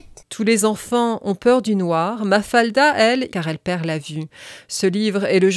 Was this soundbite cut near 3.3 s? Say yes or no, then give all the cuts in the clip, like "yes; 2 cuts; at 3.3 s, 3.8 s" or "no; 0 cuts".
yes; 1 cut; at 3.3 s